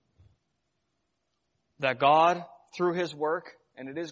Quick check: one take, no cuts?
yes; 0 cuts

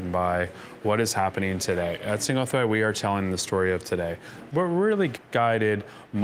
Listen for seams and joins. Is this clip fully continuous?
no; 1 cut; at 4.5 s

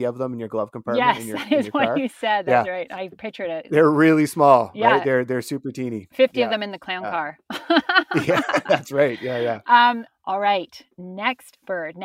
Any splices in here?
no; 0 cuts

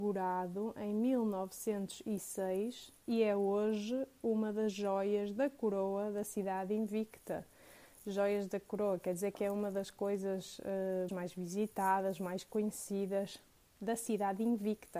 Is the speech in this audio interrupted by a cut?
yes; 1 cut; at 11.1 s

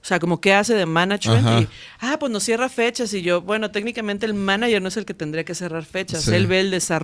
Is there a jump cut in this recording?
no; 0 cuts

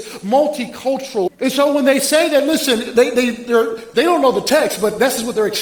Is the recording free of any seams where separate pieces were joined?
no; 1 cut; at 1.3 s

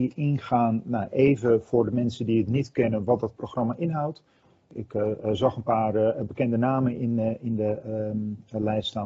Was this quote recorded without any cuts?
yes; 0 cuts

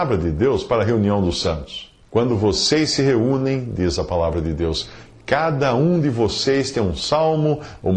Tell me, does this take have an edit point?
yes; 1 cut; at 2.0 s

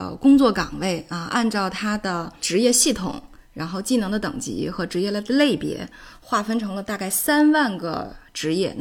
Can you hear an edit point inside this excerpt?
no; 0 cuts

